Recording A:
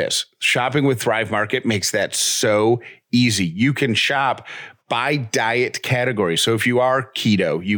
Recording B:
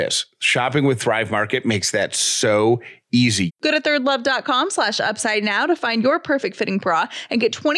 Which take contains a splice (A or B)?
B